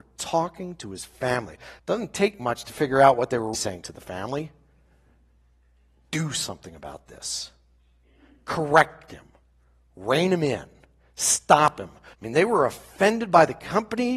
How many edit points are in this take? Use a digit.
3